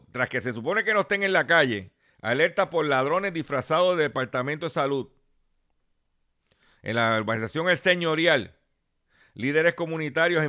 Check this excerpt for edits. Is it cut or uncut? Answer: uncut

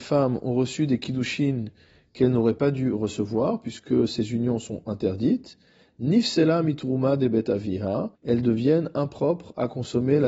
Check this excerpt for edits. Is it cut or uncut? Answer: cut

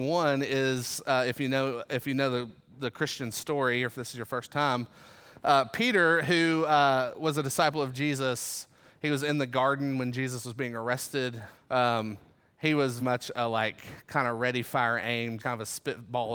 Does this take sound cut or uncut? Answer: cut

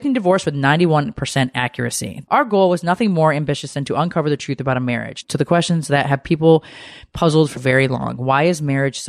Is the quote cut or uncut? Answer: cut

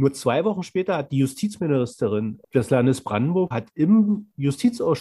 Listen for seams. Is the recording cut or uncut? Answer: cut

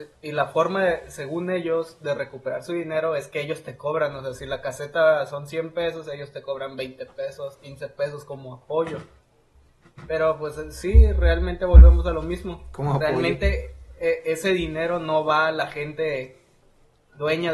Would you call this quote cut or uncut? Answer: uncut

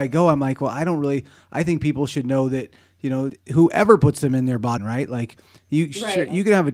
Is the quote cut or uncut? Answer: cut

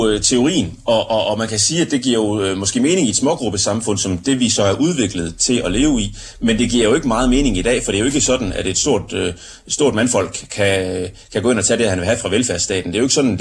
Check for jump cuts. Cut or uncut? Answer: uncut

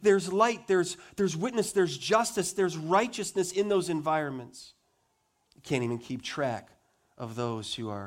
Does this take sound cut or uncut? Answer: cut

